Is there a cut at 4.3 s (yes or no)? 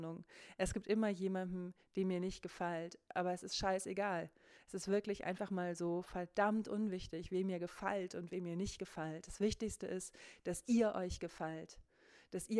no